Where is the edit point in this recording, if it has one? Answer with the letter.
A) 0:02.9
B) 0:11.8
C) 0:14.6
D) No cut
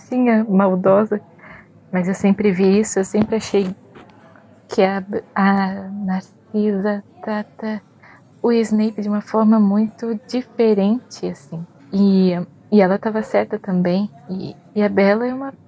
B